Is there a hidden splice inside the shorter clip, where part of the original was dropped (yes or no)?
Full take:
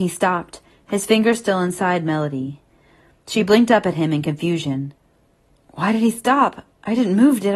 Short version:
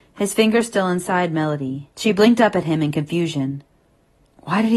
yes